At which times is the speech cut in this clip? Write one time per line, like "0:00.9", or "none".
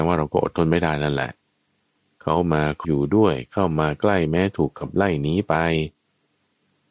0:02.8